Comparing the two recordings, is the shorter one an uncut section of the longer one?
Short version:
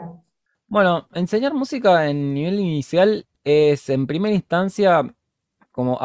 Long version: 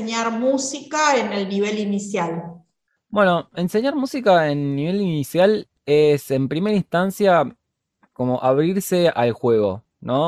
yes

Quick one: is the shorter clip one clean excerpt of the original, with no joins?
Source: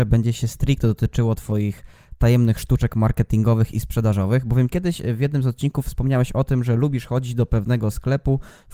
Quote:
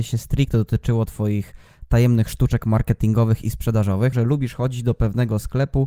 no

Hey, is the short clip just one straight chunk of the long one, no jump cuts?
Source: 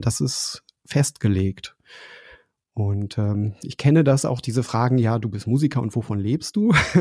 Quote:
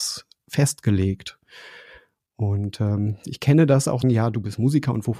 no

